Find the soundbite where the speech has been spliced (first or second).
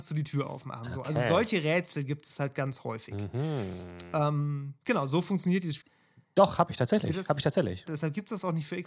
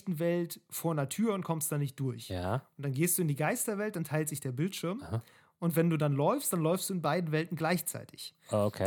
first